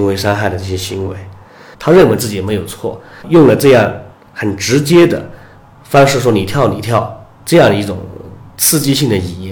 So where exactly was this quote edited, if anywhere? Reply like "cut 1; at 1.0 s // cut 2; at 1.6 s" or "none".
cut 1; at 1.7 s // cut 2; at 3.2 s